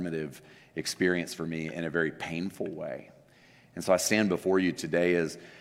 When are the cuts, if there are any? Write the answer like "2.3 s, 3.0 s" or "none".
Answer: none